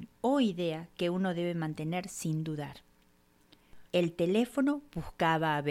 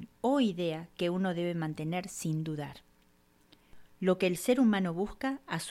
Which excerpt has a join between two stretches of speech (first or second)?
first